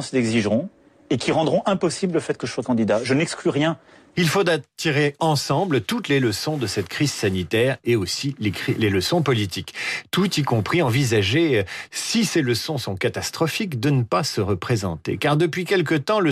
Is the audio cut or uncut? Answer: cut